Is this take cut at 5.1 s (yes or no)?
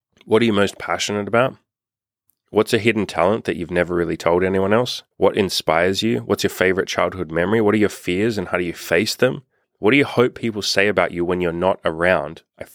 yes